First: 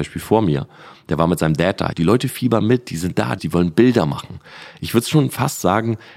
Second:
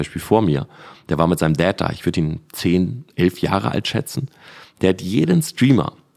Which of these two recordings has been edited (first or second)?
first